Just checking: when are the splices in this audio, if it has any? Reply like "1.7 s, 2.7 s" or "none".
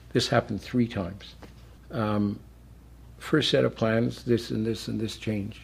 1.8 s, 4.2 s